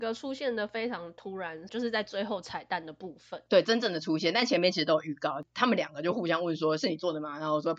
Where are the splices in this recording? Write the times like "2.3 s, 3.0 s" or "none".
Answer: 1.7 s